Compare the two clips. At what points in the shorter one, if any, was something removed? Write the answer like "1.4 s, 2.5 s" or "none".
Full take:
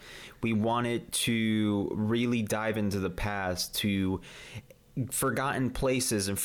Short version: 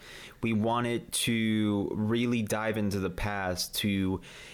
none